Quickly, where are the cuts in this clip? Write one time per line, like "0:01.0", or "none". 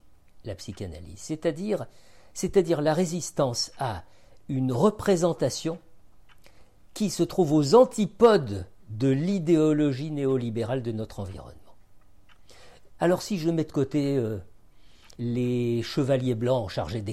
0:13.0
0:15.2